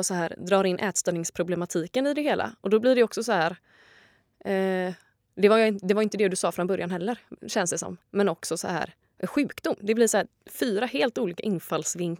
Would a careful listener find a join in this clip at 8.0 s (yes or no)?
yes